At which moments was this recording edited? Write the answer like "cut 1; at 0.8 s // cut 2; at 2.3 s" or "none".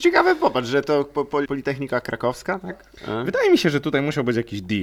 cut 1; at 1.5 s